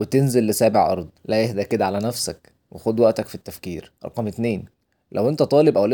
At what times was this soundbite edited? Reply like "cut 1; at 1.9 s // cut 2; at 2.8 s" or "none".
cut 1; at 1.2 s // cut 2; at 4.0 s